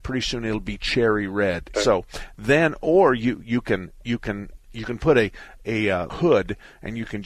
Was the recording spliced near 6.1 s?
yes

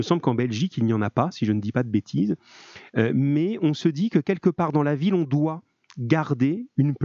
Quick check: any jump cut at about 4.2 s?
no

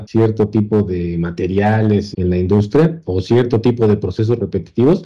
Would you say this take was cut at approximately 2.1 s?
yes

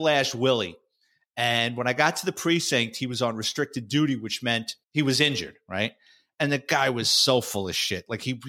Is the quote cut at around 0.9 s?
no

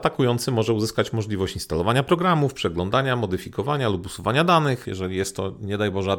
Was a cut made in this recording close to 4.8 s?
yes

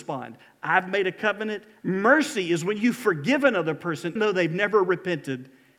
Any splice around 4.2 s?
yes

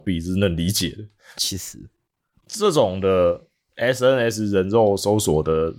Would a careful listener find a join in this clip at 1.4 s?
yes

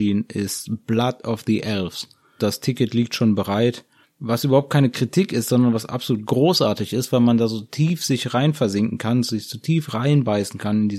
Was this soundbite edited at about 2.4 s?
yes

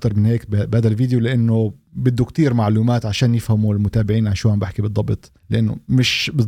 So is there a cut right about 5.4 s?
yes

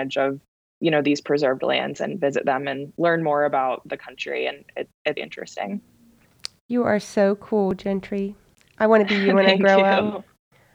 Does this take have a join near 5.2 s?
yes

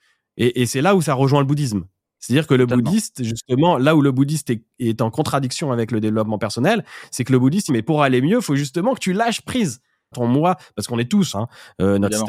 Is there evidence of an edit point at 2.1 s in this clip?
no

